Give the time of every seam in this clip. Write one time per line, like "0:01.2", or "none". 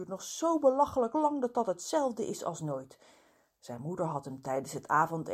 none